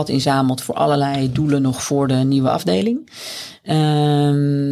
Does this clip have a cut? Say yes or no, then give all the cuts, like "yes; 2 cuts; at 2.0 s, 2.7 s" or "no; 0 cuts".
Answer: no; 0 cuts